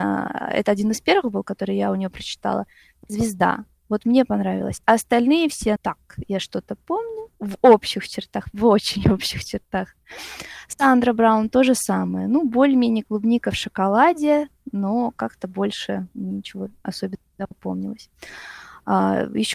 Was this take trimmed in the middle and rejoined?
yes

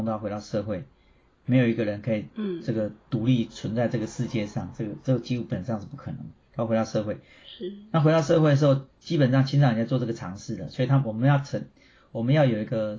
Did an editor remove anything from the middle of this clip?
no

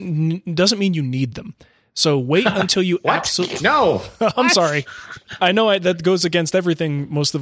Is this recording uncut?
no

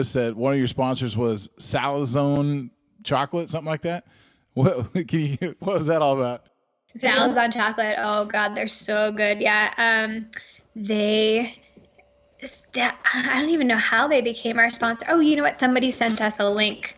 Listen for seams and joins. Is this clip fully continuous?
yes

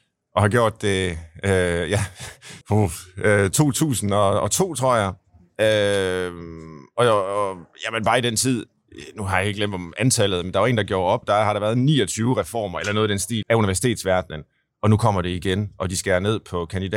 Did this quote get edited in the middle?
yes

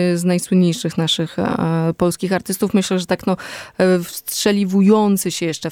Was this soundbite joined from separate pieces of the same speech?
no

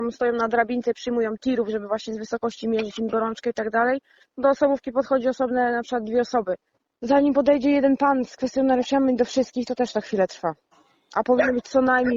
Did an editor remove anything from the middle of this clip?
no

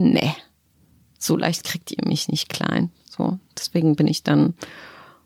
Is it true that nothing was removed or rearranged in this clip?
yes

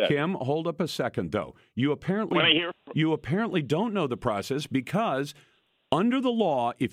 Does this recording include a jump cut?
no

